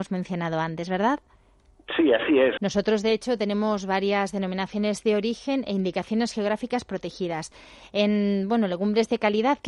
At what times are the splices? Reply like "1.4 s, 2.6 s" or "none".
2.6 s